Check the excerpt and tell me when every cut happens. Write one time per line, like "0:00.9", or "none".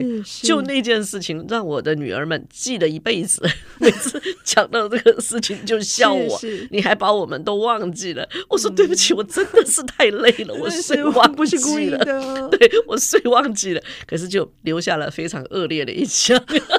none